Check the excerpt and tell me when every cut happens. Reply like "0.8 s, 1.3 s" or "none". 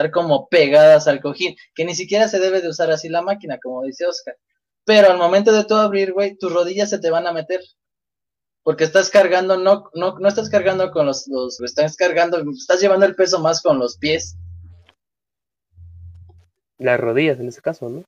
11.6 s